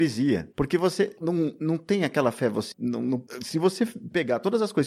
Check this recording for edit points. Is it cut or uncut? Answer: cut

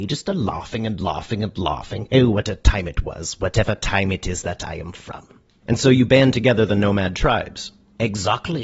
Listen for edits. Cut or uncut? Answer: uncut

